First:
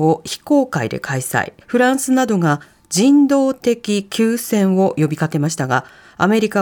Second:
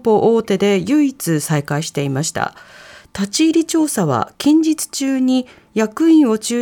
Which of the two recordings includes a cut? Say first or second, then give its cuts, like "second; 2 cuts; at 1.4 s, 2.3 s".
first; 1 cut; at 1.6 s